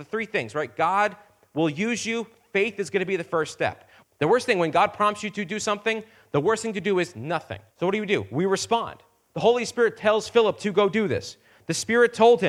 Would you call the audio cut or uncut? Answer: cut